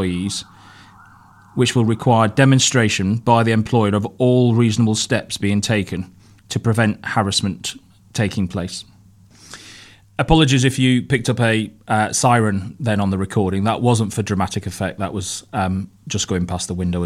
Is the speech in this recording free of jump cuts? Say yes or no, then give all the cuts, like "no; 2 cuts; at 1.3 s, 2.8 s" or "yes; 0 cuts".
yes; 0 cuts